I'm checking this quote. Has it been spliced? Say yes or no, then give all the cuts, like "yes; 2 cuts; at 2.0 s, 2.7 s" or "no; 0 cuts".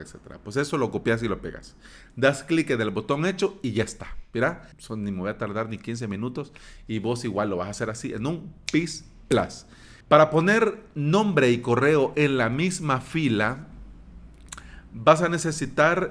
yes; 2 cuts; at 4.7 s, 10.0 s